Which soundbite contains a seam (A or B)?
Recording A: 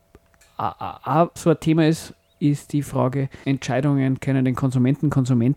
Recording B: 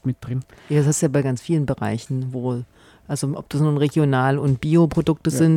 A